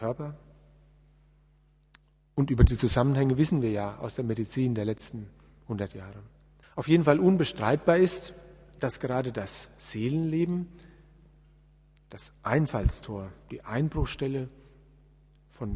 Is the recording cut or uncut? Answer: cut